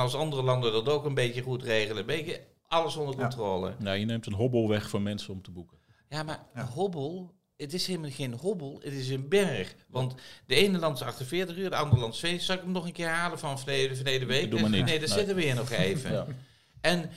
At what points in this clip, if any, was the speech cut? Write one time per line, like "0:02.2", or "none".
none